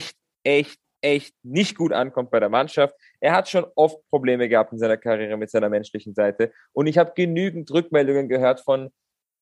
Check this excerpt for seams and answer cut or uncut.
uncut